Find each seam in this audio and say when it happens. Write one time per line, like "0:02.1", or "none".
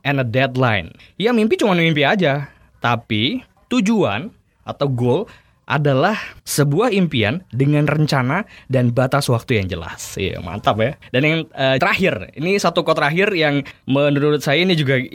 0:06.4
0:11.8